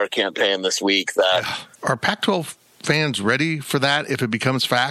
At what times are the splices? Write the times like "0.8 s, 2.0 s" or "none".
1.7 s